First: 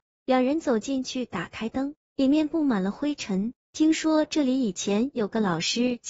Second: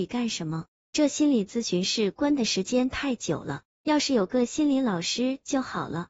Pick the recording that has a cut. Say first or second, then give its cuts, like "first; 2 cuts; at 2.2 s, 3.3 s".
first; 1 cut; at 3.7 s